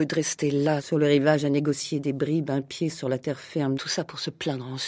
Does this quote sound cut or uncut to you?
cut